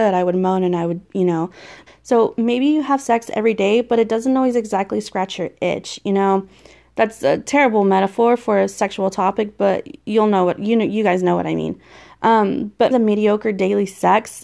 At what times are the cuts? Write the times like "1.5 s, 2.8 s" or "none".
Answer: 1.9 s, 12.9 s